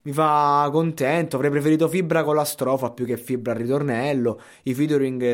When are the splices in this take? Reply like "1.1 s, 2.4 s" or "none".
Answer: none